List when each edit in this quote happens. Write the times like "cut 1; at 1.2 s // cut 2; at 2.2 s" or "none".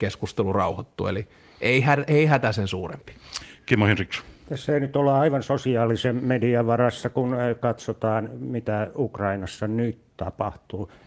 none

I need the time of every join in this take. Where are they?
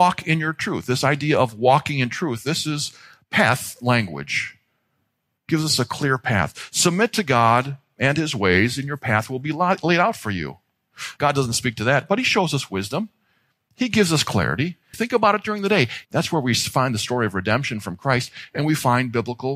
cut 1; at 11.2 s // cut 2; at 14.9 s // cut 3; at 16.0 s

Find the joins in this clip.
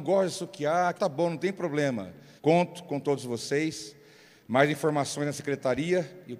cut 1; at 1.0 s // cut 2; at 2.4 s

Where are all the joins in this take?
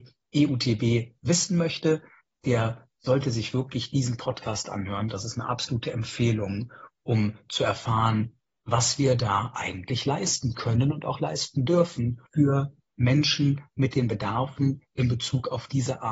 cut 1; at 12.3 s

